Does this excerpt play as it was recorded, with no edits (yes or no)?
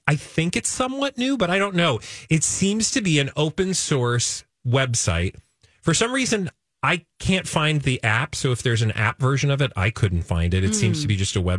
yes